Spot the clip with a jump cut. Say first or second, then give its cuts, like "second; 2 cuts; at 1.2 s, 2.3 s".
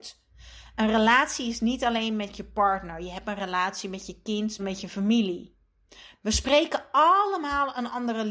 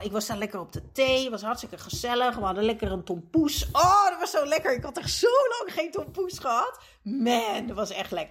first; 2 cuts; at 4.6 s, 6.1 s